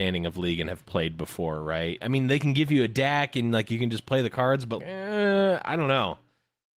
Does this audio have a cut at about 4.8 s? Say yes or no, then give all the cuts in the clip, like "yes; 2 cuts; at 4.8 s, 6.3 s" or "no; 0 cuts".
yes; 2 cuts; at 2.0 s, 4.8 s